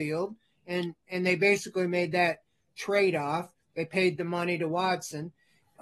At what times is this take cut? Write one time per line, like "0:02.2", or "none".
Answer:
none